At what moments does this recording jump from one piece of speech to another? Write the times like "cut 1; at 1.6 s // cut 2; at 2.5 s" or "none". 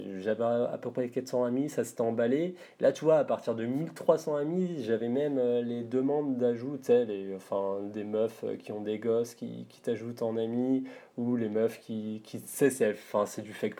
none